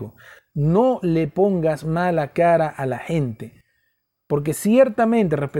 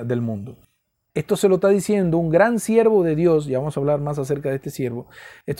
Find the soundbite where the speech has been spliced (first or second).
second